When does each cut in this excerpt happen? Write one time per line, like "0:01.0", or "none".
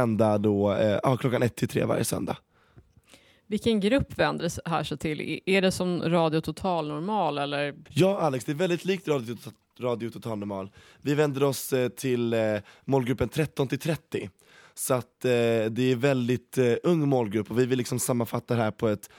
0:07.9